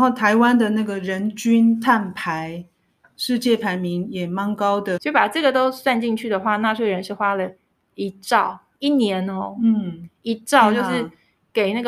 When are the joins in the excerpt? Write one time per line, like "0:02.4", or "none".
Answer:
0:05.0